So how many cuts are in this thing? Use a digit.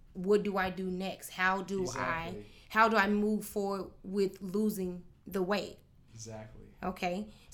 0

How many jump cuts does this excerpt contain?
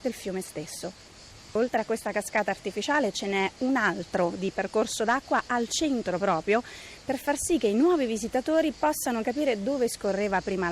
0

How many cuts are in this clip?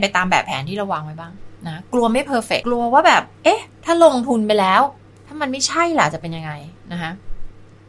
2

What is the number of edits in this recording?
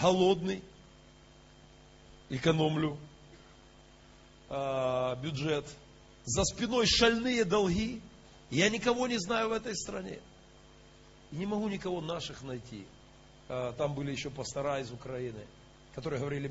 1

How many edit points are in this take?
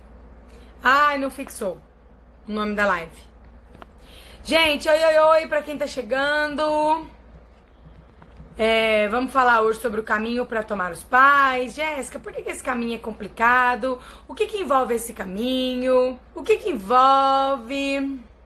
1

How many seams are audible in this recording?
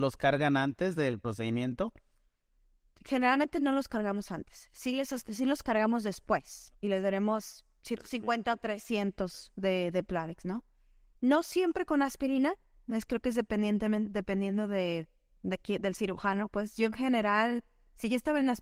1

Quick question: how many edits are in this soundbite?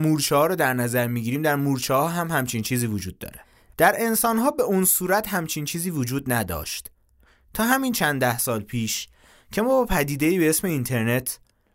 0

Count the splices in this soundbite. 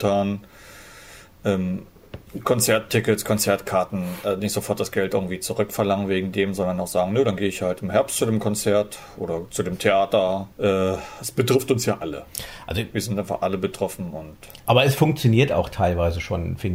1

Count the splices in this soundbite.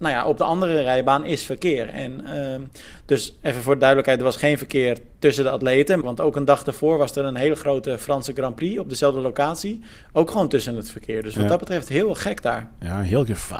1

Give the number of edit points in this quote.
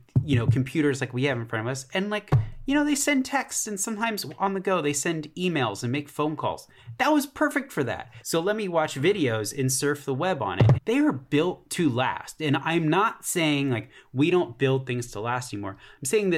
2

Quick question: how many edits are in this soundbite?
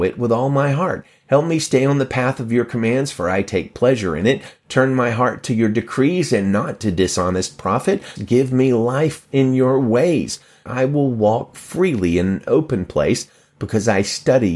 2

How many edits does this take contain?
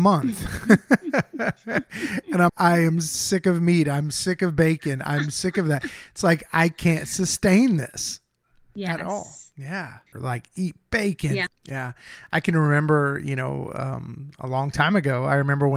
3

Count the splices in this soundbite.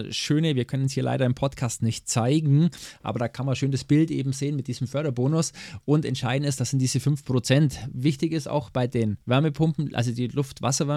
1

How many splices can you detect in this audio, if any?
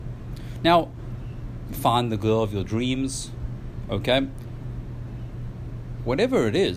1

